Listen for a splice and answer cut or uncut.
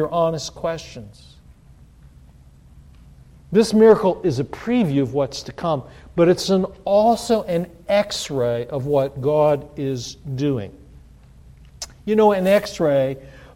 uncut